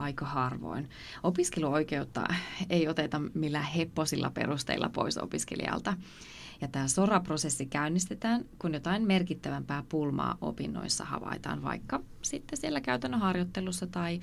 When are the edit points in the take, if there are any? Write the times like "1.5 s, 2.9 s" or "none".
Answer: 6.6 s

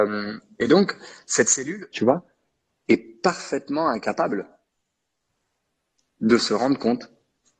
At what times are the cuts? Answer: 1.9 s

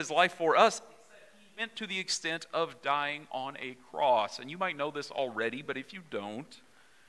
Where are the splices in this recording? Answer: none

